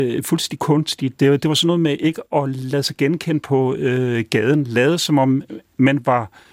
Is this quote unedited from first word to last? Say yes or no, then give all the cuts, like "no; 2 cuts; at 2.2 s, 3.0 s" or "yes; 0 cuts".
yes; 0 cuts